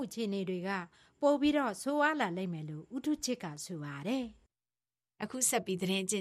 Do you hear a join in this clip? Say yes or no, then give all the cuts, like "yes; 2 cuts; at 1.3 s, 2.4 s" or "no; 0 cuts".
no; 0 cuts